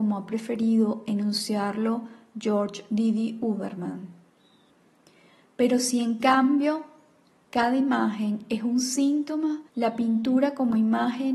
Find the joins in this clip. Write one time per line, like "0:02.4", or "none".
0:07.4
0:09.7